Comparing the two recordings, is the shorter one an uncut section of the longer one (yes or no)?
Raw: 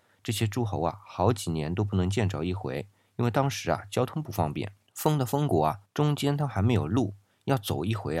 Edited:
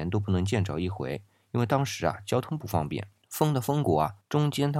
yes